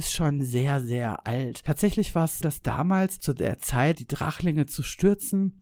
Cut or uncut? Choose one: cut